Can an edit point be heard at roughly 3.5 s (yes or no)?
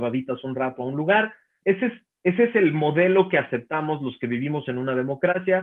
no